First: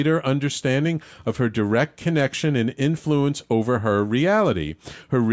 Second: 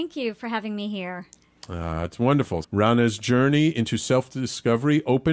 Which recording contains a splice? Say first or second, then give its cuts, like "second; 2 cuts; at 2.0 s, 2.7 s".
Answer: second; 1 cut; at 2.6 s